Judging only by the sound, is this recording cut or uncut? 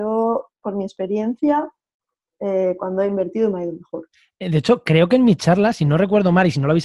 uncut